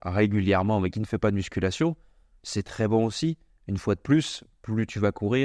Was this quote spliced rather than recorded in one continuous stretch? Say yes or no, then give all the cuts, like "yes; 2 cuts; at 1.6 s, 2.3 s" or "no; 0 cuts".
no; 0 cuts